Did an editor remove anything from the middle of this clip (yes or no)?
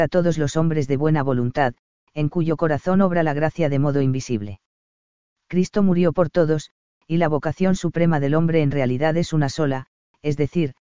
no